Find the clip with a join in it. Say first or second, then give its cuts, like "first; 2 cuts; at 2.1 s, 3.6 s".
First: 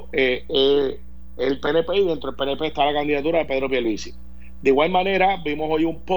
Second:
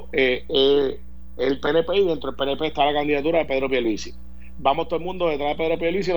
second; 1 cut; at 4.6 s